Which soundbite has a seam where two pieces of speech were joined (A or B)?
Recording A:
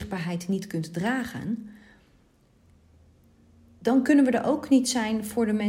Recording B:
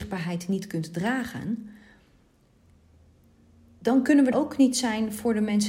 B